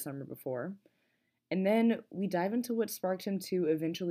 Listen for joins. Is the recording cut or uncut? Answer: uncut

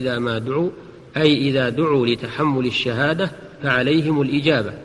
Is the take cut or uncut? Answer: cut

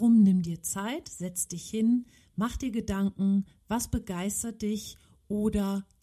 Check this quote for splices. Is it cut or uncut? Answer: uncut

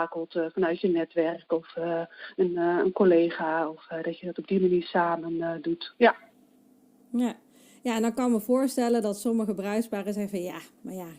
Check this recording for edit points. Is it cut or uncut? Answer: uncut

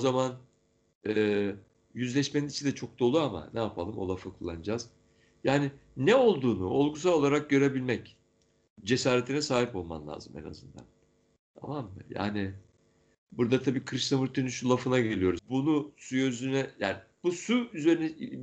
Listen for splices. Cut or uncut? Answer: cut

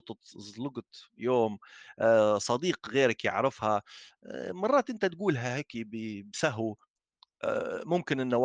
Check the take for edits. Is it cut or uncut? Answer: uncut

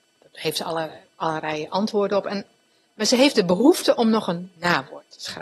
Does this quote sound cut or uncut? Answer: uncut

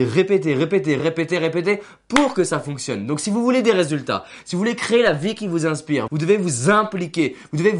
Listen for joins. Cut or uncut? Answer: cut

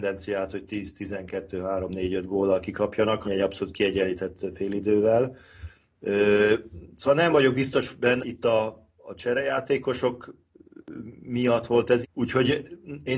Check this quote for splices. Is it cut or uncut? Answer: cut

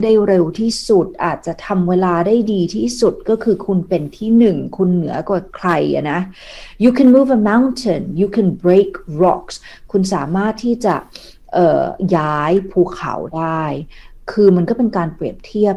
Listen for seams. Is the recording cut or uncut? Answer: uncut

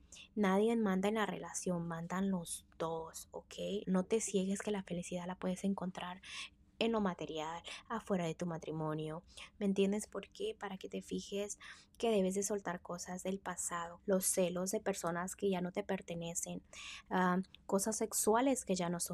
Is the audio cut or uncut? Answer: cut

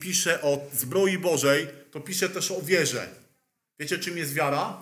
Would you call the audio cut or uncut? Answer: uncut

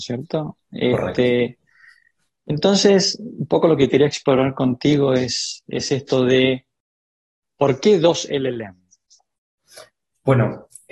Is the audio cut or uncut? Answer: uncut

